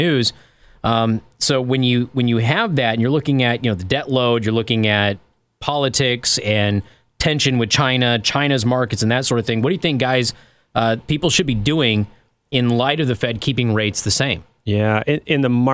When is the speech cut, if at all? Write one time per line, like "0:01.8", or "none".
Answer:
none